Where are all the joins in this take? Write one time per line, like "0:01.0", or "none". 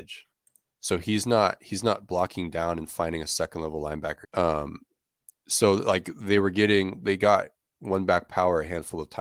0:04.2

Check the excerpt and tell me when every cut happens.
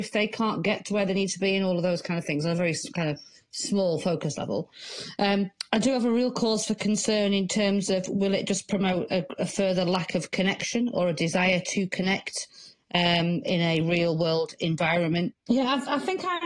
0:13.4
0:15.3

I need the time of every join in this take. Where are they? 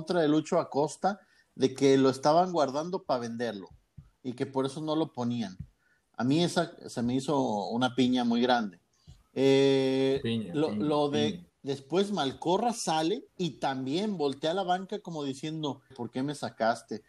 0:11.5
0:13.3
0:15.9

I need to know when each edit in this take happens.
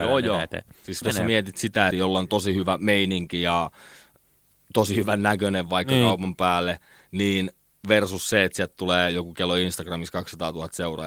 0:01.9

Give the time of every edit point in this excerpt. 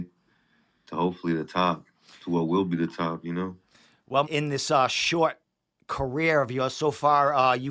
0:04.2

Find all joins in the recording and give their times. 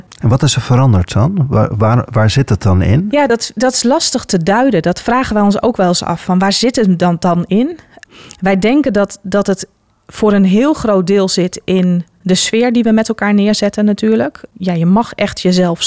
none

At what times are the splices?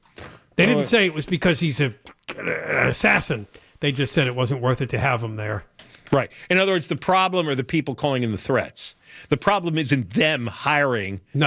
none

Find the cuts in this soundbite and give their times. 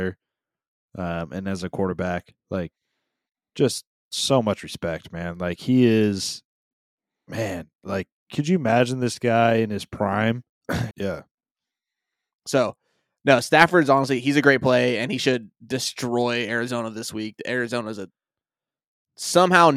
0:10.9

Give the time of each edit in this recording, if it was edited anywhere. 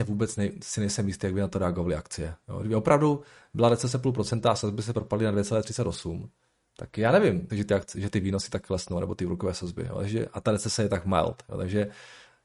0:07.5

